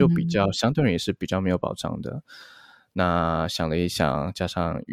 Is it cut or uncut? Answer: uncut